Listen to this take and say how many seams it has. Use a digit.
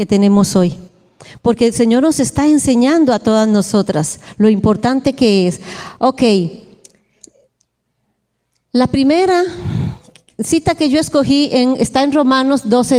0